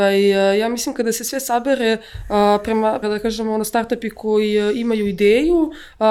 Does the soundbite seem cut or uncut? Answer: cut